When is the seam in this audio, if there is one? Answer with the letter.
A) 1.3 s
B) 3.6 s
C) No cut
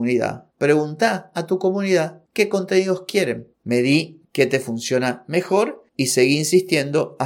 B